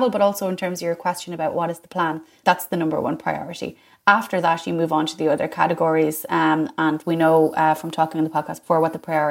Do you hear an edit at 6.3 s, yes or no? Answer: no